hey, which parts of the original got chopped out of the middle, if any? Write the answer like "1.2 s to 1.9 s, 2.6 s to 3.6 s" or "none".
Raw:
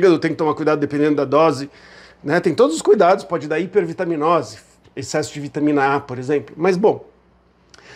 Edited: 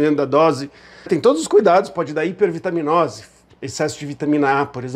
2.1 s to 2.4 s